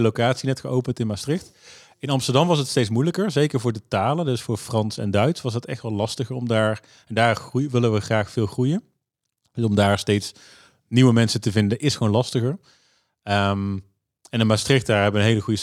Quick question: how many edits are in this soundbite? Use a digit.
0